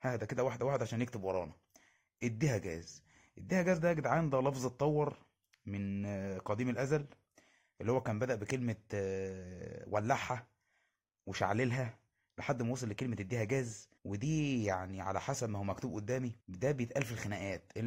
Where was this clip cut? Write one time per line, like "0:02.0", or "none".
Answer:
0:14.0
0:16.4